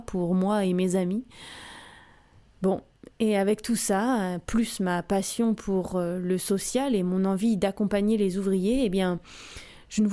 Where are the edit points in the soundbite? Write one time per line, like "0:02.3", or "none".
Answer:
0:02.5